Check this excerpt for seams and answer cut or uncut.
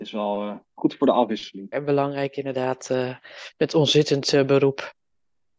cut